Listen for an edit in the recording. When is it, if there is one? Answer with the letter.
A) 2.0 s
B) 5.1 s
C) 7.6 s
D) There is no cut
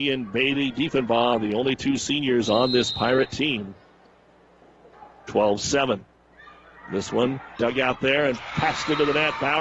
C